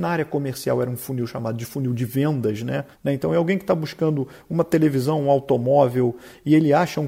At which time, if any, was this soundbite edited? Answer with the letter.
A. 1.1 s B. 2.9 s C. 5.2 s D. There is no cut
B